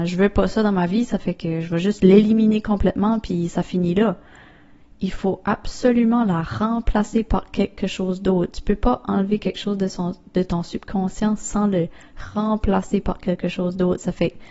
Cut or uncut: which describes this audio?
uncut